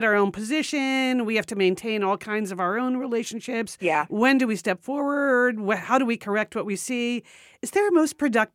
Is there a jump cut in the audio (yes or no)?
no